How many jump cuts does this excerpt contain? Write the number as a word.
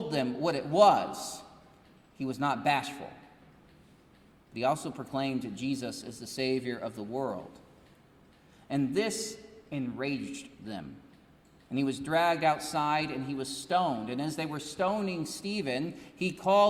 zero